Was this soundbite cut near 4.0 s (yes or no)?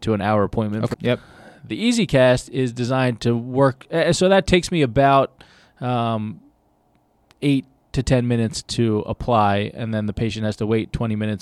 no